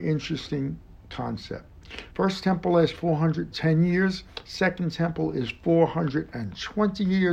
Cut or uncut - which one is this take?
cut